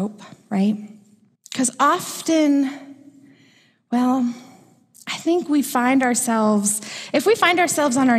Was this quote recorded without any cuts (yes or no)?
no